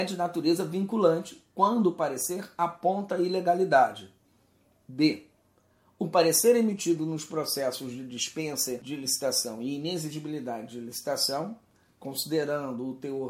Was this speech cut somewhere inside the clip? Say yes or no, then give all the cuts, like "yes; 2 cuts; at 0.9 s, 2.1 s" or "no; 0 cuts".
no; 0 cuts